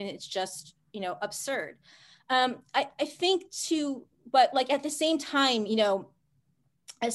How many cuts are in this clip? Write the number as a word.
zero